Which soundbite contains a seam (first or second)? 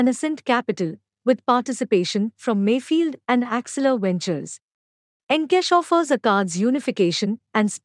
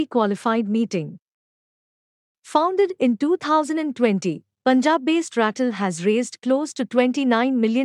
first